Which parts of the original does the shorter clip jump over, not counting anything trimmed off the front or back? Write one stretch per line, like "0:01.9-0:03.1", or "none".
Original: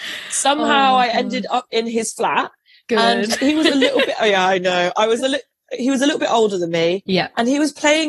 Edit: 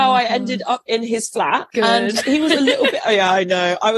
0:02.5-0:02.8